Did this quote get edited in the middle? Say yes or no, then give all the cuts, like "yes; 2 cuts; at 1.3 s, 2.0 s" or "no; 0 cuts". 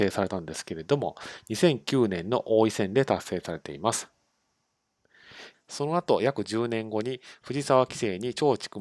yes; 1 cut; at 5.5 s